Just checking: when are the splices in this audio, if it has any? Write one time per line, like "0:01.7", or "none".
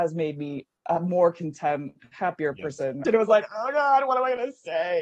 0:03.0